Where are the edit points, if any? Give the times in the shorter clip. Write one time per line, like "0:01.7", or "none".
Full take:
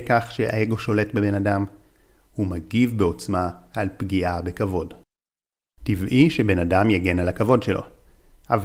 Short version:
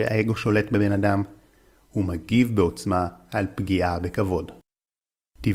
none